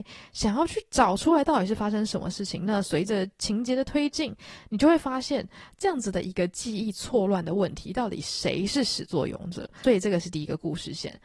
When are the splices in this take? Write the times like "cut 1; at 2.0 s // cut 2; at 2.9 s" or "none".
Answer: none

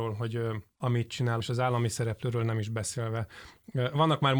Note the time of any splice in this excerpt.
cut 1; at 1.4 s

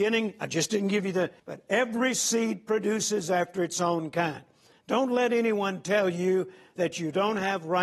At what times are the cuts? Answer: cut 1; at 1.4 s

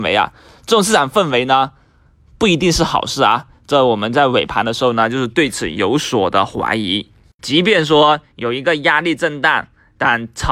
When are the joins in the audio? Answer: cut 1; at 7.4 s

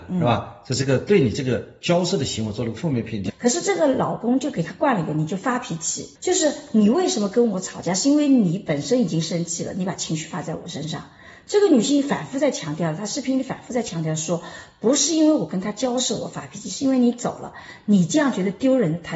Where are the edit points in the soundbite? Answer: cut 1; at 3.3 s // cut 2; at 6.1 s

